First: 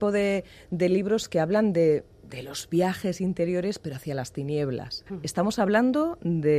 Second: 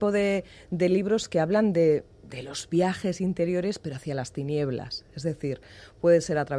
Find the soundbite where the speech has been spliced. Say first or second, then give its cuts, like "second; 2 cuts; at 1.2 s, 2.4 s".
first; 1 cut; at 5.1 s